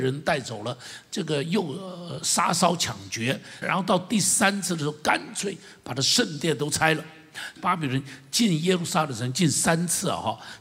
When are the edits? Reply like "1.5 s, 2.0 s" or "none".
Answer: 3.6 s, 7.6 s